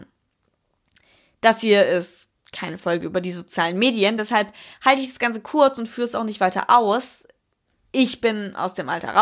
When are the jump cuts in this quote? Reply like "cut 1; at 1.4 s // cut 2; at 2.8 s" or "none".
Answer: none